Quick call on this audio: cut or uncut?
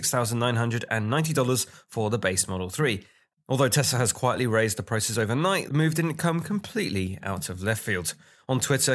cut